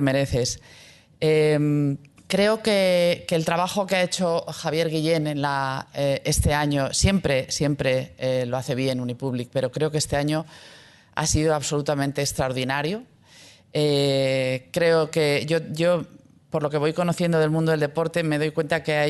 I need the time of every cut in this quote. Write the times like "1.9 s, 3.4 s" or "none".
none

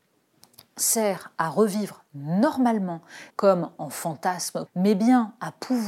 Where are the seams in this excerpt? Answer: 3.3 s, 4.7 s

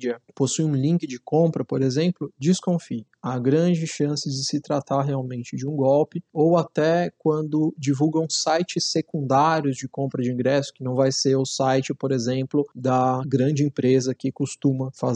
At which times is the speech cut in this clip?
none

